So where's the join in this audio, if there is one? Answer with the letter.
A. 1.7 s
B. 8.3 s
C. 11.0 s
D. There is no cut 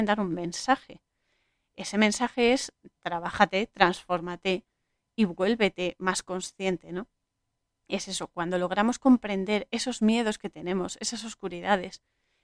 D